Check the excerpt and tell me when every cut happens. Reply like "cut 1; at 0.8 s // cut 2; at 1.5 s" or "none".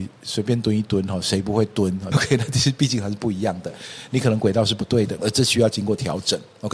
cut 1; at 2.1 s // cut 2; at 5.2 s